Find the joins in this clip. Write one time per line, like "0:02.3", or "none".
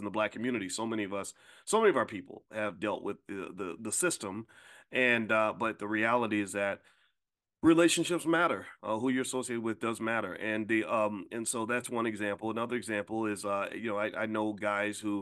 0:03.8